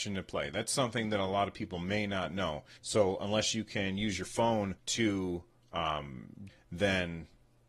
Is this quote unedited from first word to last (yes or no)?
no